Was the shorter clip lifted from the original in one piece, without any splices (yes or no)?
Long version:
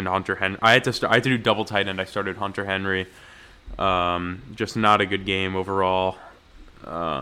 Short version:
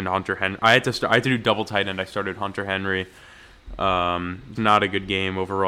no